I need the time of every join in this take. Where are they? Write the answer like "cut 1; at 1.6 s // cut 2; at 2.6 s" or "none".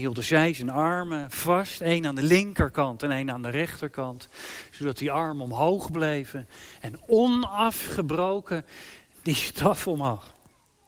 none